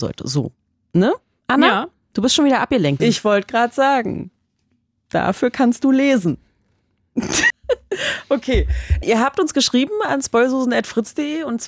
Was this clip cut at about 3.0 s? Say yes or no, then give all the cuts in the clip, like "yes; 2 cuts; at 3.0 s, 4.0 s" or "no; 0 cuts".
yes; 3 cuts; at 3.0 s, 7.5 s, 9.0 s